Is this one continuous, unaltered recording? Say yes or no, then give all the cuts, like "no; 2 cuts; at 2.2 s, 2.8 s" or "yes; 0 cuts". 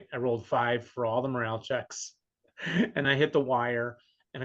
no; 1 cut; at 3.0 s